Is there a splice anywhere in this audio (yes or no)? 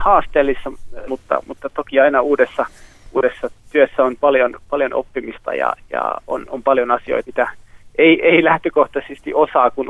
yes